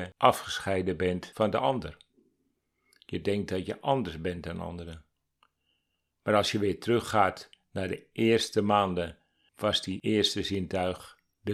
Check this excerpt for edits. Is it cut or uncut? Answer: uncut